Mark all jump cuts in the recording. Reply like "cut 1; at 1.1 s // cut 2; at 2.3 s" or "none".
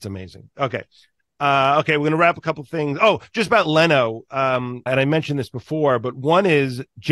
cut 1; at 4.9 s

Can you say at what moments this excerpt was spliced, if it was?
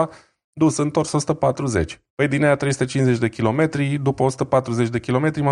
cut 1; at 2.1 s

